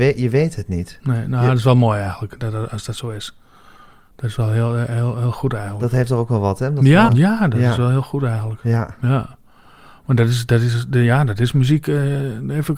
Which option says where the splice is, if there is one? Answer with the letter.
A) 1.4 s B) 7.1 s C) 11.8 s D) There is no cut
B